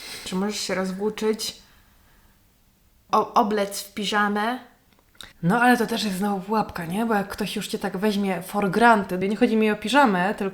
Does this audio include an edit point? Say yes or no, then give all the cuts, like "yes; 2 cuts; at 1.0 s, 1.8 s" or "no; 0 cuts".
yes; 3 cuts; at 3.1 s, 5.3 s, 9.2 s